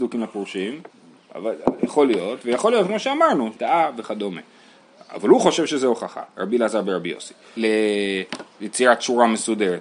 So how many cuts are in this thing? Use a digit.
2